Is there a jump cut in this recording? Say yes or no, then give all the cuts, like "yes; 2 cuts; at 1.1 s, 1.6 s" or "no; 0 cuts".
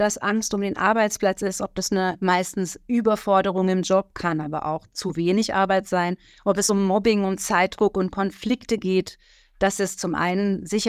no; 0 cuts